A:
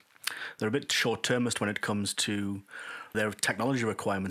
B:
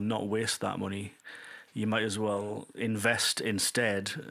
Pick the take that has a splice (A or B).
A